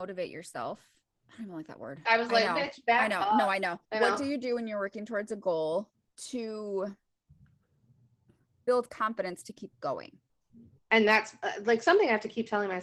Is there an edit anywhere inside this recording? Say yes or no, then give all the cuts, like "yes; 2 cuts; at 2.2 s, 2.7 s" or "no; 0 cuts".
yes; 3 cuts; at 2.0 s, 3.8 s, 10.8 s